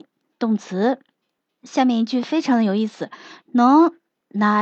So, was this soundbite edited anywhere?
no; 0 cuts

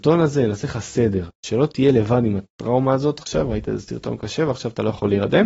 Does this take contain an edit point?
no; 0 cuts

